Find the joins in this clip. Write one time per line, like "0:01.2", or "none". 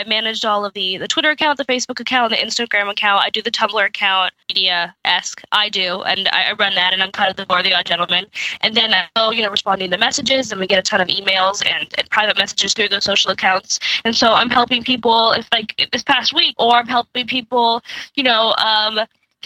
0:16.5